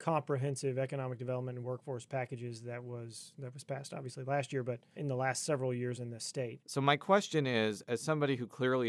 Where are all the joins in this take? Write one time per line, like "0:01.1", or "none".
0:04.9
0:06.6